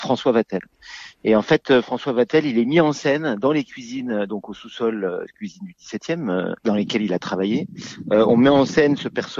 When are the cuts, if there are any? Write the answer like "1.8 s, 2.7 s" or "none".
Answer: none

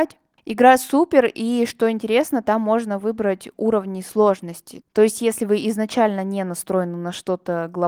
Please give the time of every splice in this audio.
none

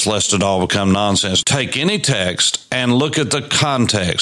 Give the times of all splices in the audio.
1.4 s

